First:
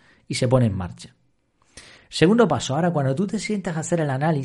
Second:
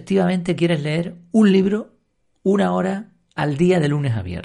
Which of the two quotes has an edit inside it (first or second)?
first